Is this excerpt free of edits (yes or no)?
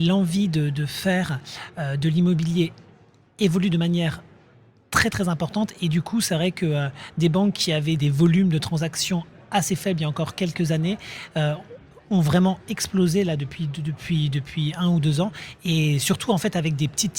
no